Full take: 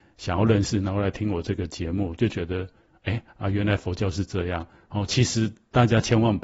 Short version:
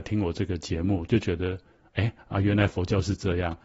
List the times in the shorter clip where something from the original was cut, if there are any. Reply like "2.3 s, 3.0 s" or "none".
none